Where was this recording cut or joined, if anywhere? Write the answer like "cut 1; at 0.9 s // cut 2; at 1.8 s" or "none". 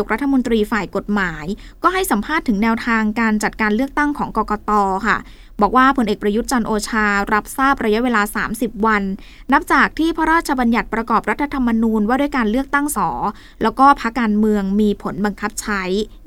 cut 1; at 12.9 s // cut 2; at 14.1 s